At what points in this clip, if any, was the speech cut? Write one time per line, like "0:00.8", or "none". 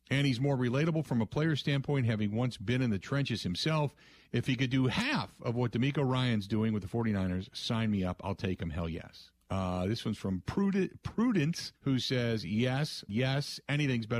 0:09.4
0:11.8
0:13.1